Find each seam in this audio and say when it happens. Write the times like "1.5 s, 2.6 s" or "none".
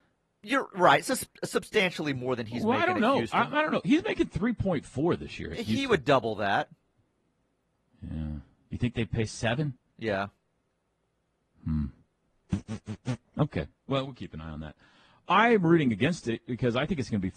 none

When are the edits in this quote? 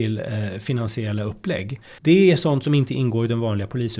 2.0 s

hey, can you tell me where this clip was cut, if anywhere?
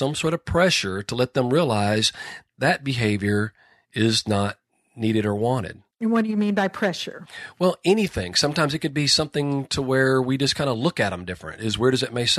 none

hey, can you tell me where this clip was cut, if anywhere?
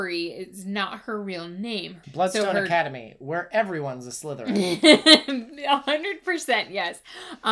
2.0 s

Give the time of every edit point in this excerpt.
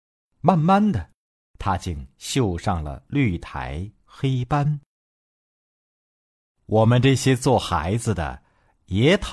none

